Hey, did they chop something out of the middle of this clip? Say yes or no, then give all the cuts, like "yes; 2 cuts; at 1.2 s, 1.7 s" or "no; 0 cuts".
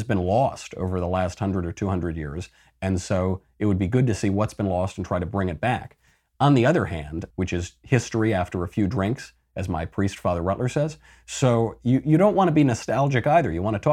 yes; 1 cut; at 7.3 s